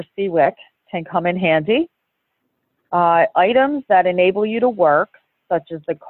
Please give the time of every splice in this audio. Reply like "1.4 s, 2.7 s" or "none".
none